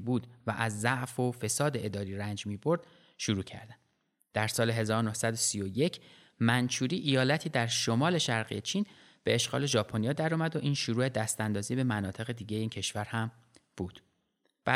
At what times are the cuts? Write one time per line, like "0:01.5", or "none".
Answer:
none